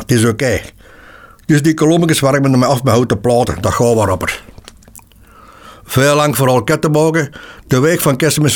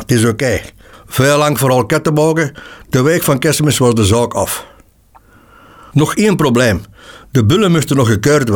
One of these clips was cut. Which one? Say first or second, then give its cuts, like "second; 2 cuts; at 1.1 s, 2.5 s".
second; 1 cut; at 0.9 s